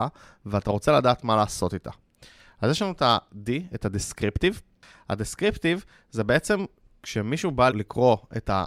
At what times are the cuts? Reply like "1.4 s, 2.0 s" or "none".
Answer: 7.7 s